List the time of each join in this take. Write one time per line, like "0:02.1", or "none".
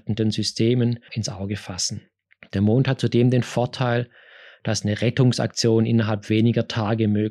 0:01.1